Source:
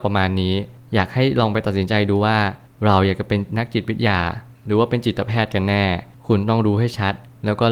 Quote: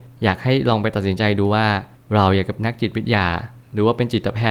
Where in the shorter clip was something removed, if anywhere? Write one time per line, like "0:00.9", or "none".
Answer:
0:02.6

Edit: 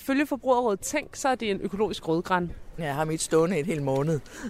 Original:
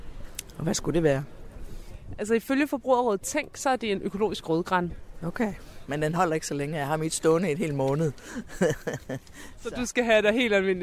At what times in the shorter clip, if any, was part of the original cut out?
0:02.8

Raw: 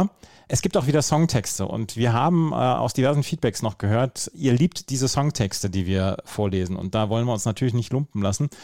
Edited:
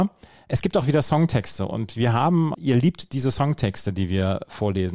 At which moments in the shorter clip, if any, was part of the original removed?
0:02.5

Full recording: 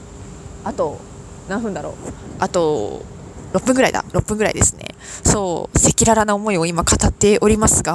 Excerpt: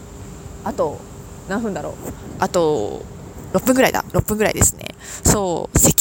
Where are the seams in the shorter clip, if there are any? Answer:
none

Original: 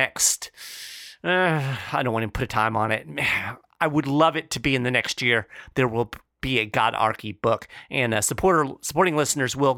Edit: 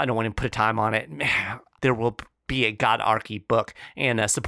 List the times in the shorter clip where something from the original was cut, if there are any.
0:01.8

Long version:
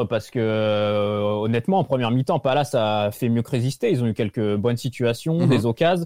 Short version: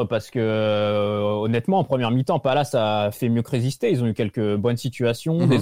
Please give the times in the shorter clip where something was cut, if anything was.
none

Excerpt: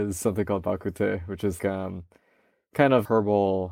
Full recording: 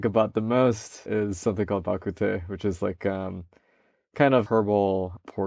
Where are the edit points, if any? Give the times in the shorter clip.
0:01.6

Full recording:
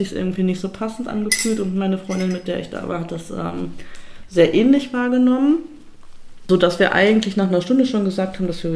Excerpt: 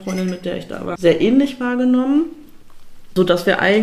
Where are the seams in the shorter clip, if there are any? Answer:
0:01.0

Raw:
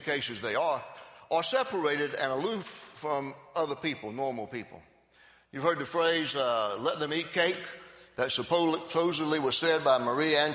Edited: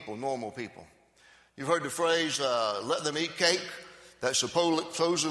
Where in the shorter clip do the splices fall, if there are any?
none

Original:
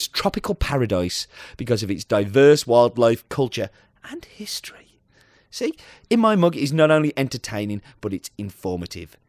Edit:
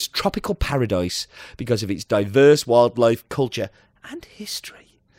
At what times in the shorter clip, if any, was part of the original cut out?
none

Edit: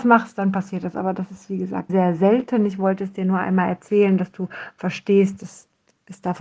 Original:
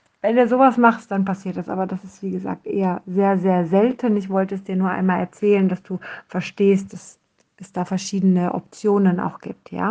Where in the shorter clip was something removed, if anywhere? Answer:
0:01.9

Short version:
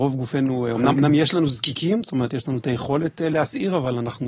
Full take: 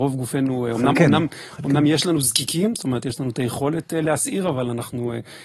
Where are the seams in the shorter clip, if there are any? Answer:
0:00.9

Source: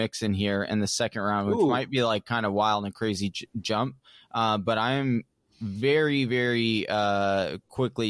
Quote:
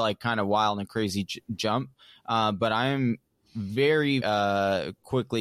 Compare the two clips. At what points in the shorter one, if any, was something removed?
0:04.2

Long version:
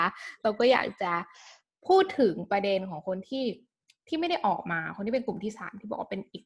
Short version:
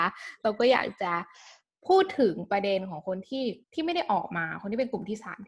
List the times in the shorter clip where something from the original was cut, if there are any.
0:03.6

